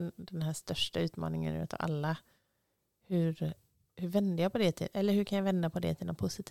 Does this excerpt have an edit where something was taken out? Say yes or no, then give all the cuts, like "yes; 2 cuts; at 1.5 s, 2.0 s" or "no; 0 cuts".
no; 0 cuts